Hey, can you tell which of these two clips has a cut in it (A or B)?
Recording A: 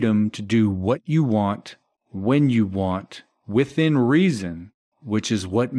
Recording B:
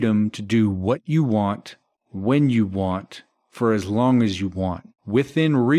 A